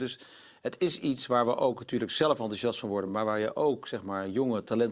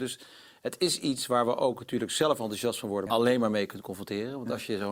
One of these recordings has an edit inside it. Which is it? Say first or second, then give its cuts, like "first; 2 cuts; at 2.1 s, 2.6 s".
second; 1 cut; at 3.1 s